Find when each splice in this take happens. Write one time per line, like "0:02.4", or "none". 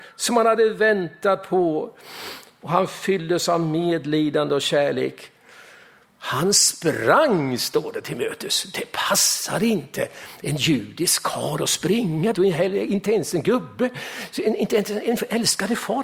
0:12.3